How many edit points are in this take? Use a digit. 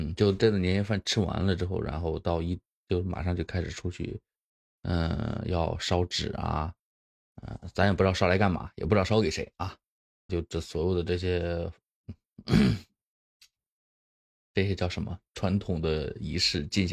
1